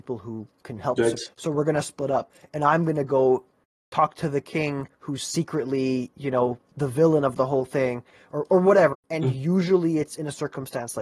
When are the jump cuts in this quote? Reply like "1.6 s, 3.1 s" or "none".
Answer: 1.3 s, 8.9 s